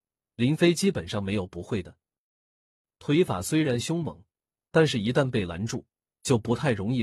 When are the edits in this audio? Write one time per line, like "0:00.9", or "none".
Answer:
0:02.8